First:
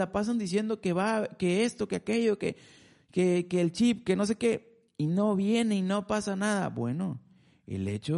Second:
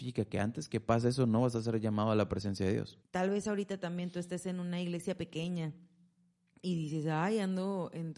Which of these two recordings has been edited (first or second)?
second